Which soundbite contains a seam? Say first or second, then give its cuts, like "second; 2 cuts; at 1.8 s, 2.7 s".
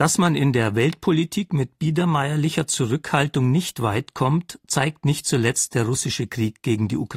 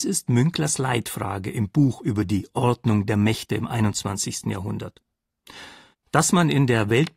second; 1 cut; at 5.9 s